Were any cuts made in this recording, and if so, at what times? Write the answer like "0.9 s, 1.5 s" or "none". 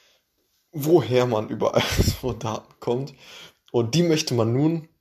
none

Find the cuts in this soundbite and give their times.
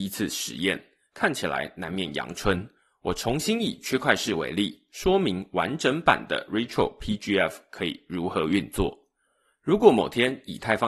none

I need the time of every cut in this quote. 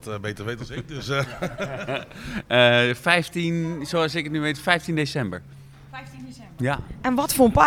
none

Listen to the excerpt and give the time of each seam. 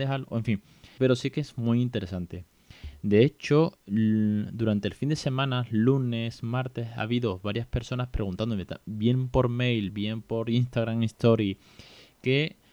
1.0 s, 9.9 s

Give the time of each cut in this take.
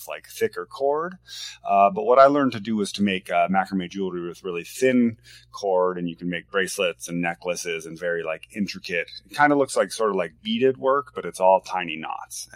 none

